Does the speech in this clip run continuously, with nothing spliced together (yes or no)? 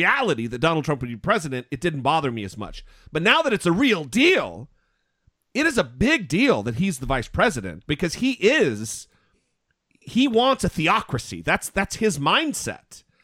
yes